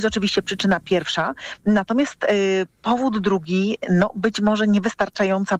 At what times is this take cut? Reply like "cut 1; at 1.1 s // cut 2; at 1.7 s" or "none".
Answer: none

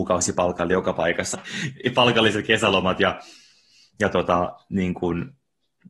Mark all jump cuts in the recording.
cut 1; at 1.3 s

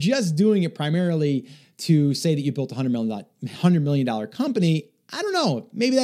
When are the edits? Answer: none

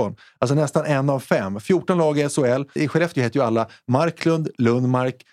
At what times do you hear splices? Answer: cut 1; at 2.8 s

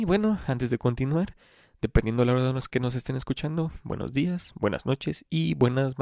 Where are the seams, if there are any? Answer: cut 1; at 2.7 s // cut 2; at 4.5 s

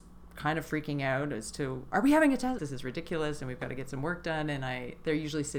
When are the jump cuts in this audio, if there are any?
cut 1; at 2.6 s

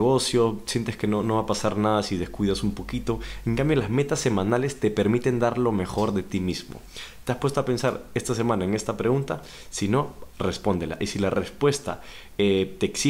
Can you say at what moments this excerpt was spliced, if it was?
none

